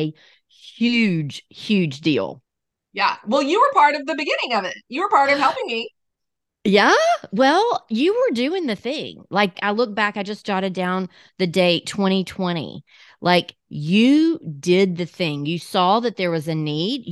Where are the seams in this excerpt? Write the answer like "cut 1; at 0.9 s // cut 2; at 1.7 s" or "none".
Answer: cut 1; at 9.5 s